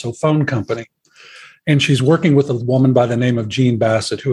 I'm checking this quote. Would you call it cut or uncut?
uncut